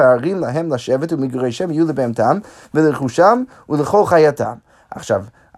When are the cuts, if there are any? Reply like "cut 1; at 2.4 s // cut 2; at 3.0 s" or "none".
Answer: none